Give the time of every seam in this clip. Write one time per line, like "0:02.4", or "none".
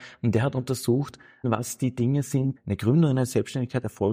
0:01.4
0:02.6